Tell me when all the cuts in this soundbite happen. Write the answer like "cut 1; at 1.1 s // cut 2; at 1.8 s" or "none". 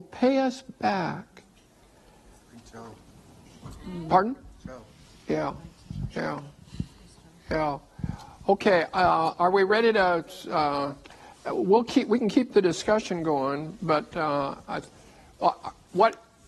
none